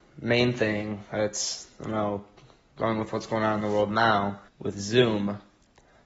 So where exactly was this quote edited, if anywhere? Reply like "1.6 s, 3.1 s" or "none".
4.5 s